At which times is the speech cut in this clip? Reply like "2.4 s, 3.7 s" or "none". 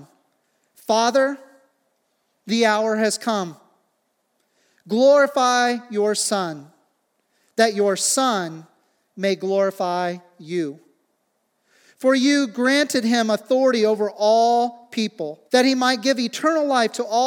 15.5 s